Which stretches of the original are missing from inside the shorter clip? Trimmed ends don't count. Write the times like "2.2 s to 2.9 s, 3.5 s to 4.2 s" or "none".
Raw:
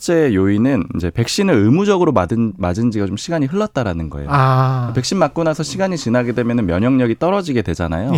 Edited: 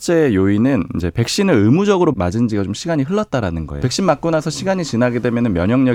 2.1 s to 2.6 s, 4.2 s to 4.9 s